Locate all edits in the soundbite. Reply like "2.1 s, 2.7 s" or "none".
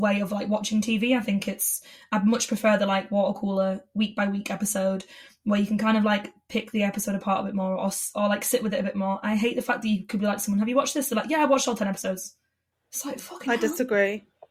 none

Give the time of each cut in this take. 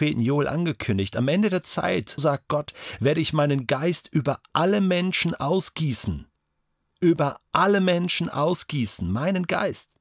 2.2 s

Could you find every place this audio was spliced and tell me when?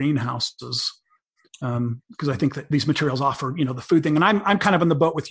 none

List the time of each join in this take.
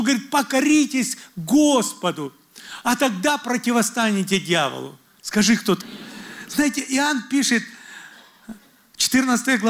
5.8 s

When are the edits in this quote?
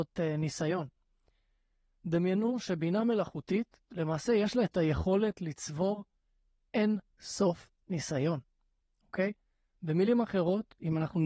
none

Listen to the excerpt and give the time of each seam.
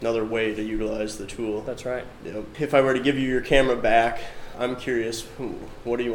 2.5 s, 4.5 s

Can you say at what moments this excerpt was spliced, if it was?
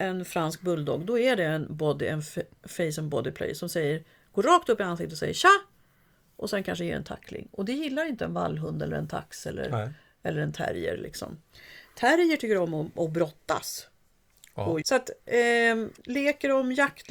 14.8 s, 16.0 s

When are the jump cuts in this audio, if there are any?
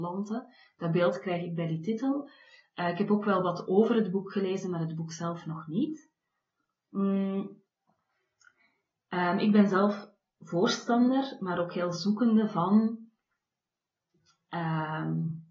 none

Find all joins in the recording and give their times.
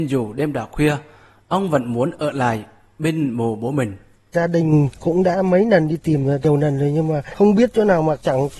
none

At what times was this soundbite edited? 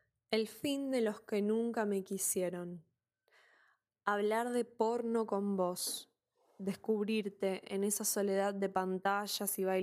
none

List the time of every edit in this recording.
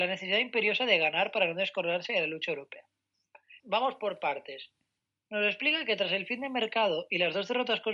3.6 s

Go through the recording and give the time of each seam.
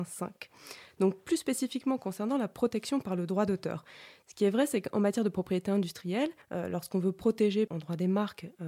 6.4 s, 7.7 s

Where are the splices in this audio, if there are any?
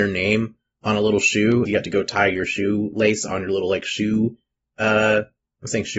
1.6 s

